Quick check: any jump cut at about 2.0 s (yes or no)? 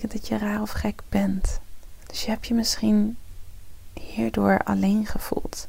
yes